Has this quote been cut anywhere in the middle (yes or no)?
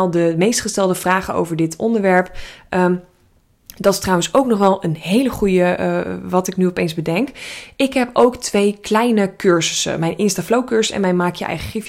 no